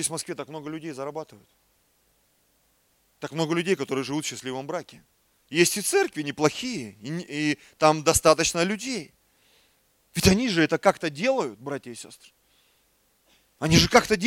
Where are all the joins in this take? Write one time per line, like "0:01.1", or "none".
0:05.4